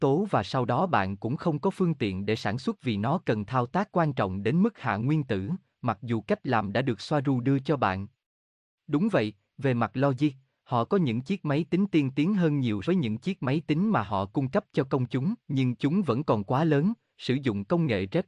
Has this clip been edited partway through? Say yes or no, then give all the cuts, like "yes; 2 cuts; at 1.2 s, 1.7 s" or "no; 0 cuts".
yes; 2 cuts; at 12.8 s, 15.4 s